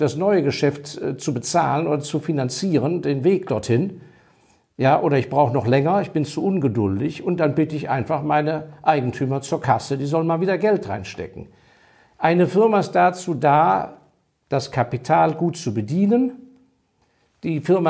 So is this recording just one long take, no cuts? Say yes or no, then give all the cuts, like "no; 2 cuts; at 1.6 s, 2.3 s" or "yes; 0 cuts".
yes; 0 cuts